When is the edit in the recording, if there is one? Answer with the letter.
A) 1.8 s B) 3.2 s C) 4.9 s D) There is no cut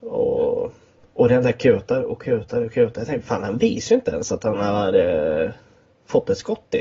D